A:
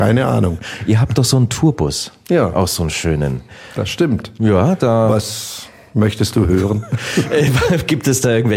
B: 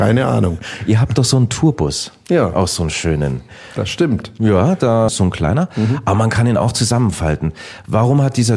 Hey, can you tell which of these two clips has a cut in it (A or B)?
B